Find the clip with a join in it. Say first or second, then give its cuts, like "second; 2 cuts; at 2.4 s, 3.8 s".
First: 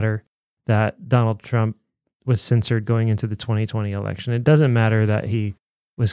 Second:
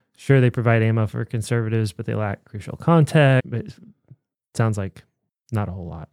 second; 1 cut; at 3.4 s